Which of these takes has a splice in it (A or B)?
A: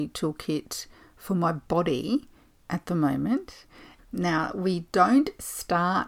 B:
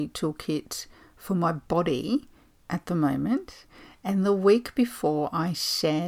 A